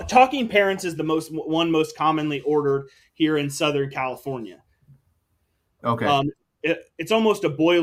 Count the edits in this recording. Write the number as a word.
zero